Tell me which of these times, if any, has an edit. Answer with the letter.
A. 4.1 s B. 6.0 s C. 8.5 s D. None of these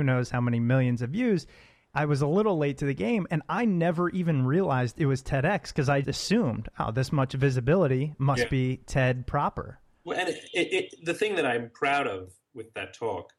B